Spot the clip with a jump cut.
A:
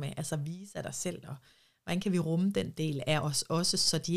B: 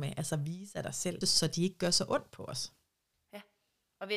B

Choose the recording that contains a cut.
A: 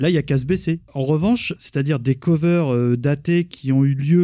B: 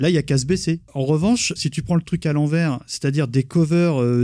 A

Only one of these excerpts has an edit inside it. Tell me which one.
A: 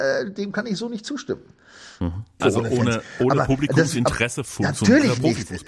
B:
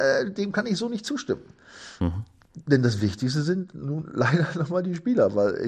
A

